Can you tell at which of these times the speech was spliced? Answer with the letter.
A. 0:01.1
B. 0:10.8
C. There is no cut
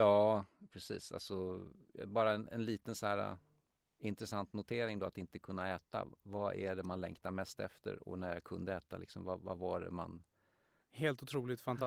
B